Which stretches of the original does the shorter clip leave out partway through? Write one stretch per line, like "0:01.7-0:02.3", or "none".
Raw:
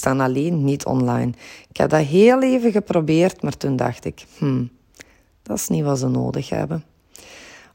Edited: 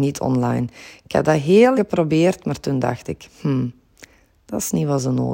0:02.4-0:02.7